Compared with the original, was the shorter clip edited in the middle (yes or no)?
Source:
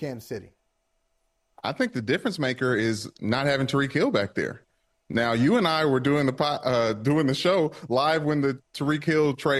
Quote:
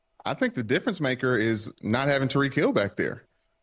no